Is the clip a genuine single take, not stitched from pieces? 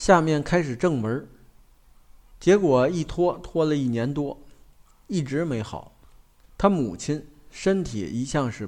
no; 2 cuts; at 2.3 s, 6.4 s

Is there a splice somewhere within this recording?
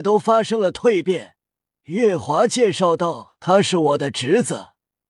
yes; 1 cut; at 1.7 s

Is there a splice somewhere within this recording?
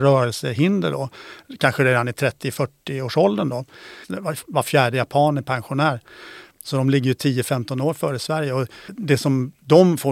yes; 1 cut; at 4.0 s

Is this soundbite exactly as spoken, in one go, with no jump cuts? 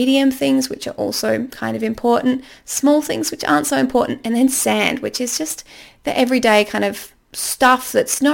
yes; 0 cuts

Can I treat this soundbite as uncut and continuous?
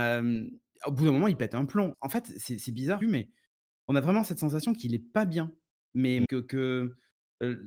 no; 3 cuts; at 1.9 s, 3.0 s, 6.2 s

